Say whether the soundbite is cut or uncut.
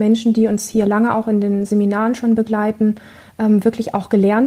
uncut